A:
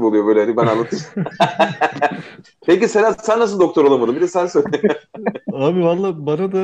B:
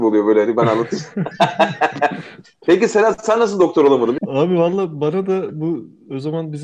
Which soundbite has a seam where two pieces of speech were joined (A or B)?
B